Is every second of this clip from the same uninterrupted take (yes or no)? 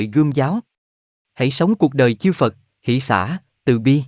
yes